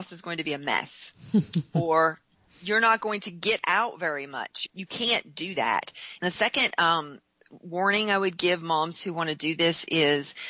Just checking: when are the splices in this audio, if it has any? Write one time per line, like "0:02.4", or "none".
0:04.7
0:06.2